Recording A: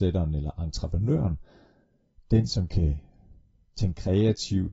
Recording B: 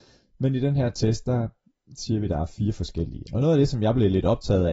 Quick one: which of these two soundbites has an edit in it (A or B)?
B